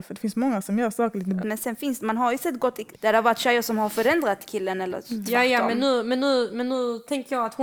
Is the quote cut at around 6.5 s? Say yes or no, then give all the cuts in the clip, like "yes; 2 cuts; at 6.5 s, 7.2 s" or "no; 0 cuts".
no; 2 cuts; at 1.4 s, 2.9 s